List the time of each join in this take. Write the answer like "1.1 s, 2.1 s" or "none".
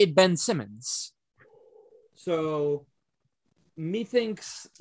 none